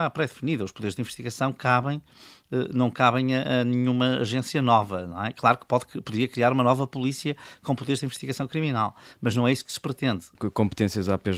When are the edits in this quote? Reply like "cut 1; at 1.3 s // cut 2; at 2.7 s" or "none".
cut 1; at 10.3 s